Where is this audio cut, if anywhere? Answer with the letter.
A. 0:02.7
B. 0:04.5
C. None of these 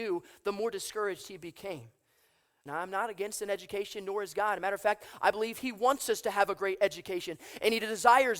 A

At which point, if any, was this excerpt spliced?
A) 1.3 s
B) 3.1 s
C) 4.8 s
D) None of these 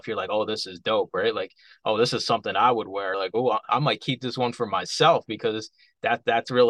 D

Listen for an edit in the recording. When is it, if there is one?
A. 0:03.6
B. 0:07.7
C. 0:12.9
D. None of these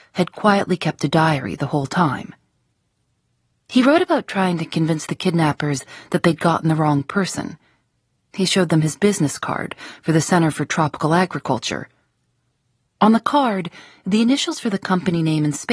C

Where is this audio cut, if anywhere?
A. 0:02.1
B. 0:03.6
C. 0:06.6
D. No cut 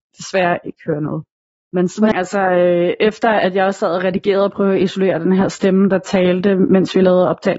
A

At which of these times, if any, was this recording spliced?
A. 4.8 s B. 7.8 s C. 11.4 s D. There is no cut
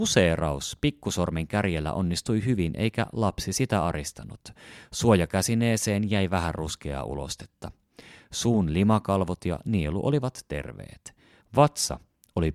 C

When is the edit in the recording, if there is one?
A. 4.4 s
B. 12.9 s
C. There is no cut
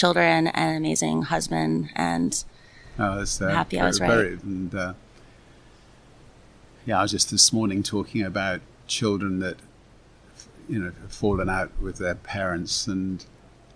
A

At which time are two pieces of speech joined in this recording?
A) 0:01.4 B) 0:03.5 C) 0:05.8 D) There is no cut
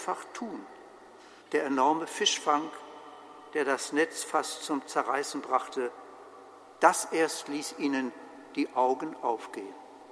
A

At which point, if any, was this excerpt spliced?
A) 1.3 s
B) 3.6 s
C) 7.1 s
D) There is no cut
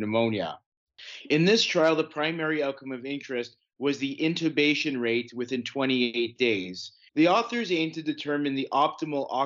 C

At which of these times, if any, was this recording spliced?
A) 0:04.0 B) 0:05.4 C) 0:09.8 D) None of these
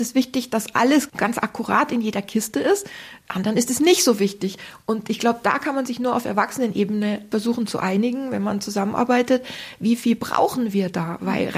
D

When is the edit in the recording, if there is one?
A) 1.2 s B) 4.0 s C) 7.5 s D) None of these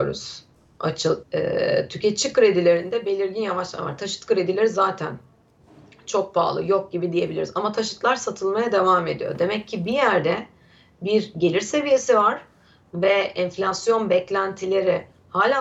A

